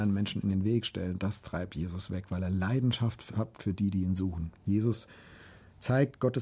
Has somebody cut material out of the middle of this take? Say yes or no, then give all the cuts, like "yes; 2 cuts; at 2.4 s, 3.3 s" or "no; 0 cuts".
yes; 1 cut; at 4.6 s